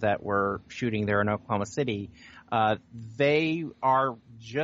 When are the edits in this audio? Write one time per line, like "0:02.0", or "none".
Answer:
none